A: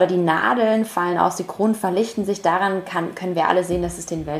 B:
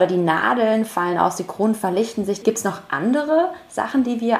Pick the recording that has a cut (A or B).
B